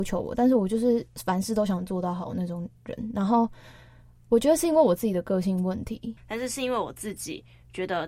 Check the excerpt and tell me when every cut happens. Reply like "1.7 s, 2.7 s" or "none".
6.2 s